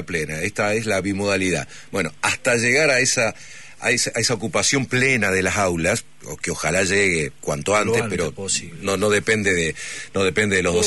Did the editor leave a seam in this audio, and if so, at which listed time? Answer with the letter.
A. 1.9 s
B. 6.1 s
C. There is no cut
C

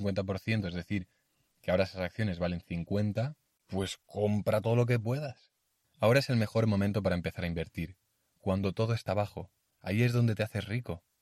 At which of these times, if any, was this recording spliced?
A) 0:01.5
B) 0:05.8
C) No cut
B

